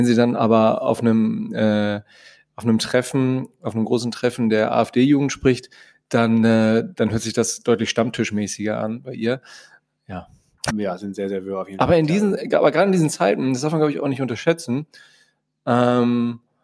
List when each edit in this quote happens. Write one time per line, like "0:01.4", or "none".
0:10.7